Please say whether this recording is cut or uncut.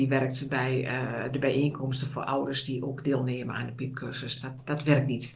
uncut